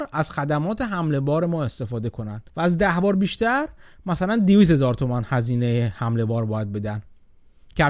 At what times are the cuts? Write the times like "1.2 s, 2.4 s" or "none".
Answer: 2.5 s